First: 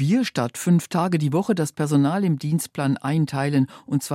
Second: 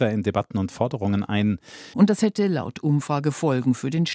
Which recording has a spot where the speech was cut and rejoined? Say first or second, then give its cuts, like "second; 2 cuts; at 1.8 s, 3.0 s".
second; 1 cut; at 1.9 s